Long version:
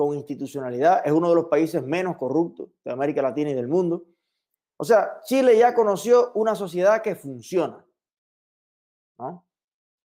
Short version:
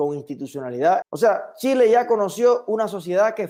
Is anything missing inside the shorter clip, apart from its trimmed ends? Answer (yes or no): yes